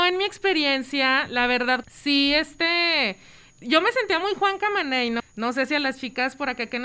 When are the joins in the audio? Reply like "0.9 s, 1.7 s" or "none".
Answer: 1.8 s, 5.2 s

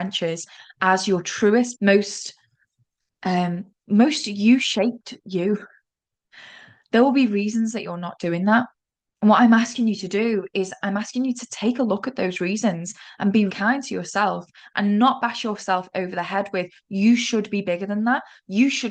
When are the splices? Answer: 1.7 s, 13.5 s

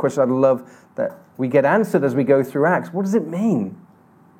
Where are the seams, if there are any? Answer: none

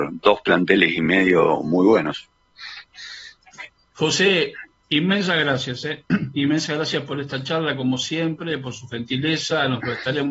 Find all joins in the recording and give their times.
3.9 s

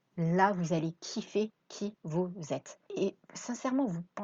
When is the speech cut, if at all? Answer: 2.9 s

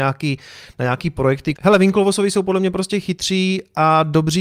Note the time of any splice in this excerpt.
1.6 s

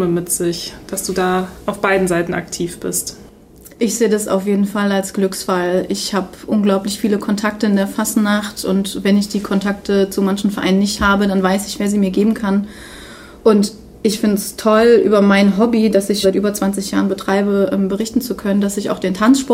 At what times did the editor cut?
16.2 s

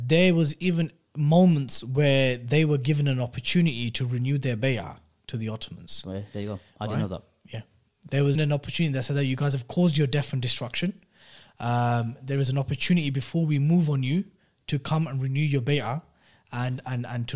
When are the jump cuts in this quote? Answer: 8.3 s

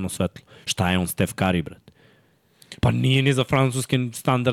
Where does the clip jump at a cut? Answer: 2.8 s

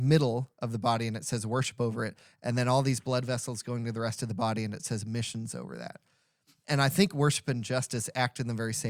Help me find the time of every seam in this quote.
none

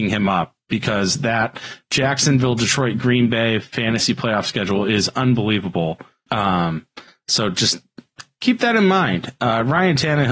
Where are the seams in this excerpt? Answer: 6.3 s

